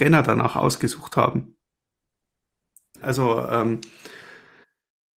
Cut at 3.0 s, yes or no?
yes